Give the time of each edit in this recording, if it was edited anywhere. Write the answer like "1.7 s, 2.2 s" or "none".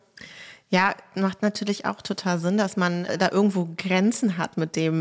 none